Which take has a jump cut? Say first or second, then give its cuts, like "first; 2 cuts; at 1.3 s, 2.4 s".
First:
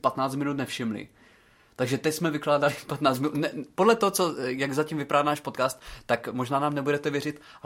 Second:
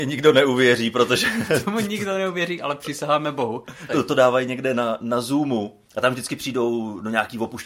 second; 2 cuts; at 3.9 s, 5.9 s